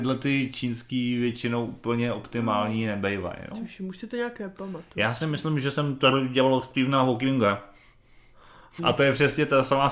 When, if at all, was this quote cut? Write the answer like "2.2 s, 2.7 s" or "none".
3.5 s, 8.8 s